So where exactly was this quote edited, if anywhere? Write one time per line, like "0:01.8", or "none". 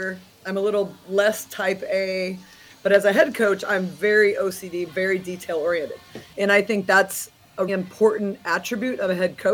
0:04.9
0:06.3
0:07.7